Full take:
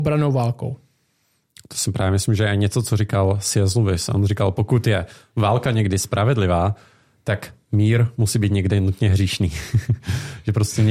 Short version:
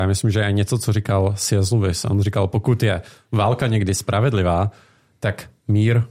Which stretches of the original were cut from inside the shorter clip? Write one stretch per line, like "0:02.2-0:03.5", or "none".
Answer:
none